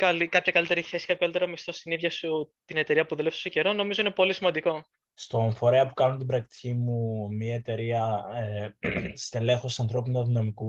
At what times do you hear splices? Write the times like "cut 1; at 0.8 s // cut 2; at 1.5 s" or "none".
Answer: cut 1; at 5.0 s